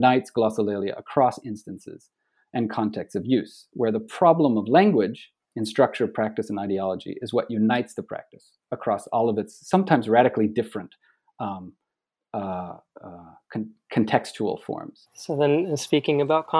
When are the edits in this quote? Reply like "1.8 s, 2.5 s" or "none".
15.1 s